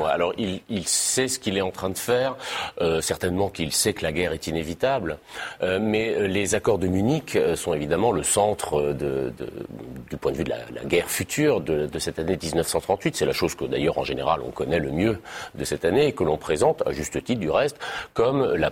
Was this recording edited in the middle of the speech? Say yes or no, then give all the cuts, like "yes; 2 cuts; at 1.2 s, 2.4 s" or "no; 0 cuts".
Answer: no; 0 cuts